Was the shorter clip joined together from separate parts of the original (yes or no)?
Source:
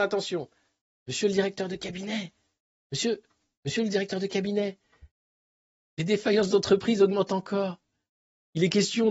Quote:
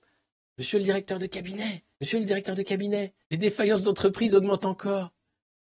yes